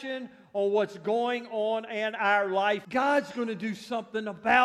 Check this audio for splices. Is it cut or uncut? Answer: cut